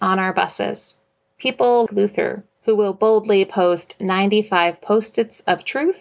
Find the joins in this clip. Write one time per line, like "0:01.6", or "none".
0:01.9